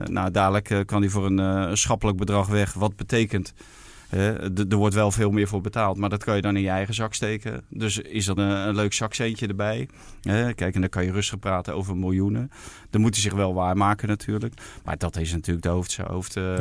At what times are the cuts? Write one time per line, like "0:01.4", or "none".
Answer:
0:08.4